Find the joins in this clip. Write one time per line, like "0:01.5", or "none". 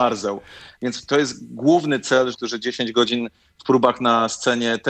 0:02.3